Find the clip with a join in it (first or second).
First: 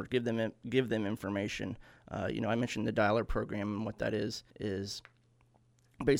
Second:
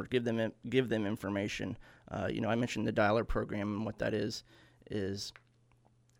first